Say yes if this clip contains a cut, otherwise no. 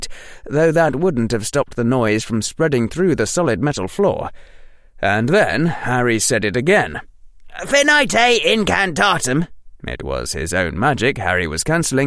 yes